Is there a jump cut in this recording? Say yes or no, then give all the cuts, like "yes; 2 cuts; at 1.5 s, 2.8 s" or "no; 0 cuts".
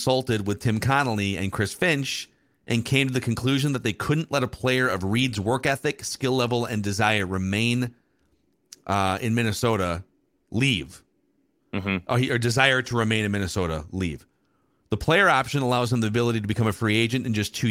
no; 0 cuts